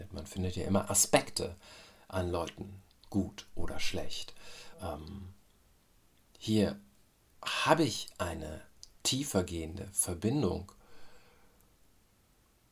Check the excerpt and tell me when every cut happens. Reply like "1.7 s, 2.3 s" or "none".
4.7 s